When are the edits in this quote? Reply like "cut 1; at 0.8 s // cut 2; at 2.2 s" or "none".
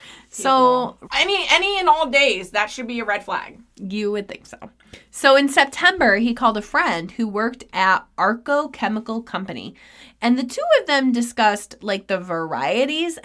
cut 1; at 1.0 s